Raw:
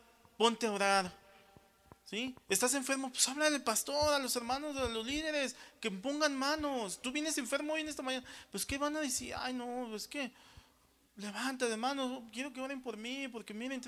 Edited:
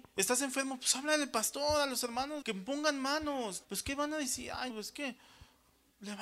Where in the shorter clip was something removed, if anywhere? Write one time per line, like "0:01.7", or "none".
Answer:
0:02.4
0:03.6
0:04.7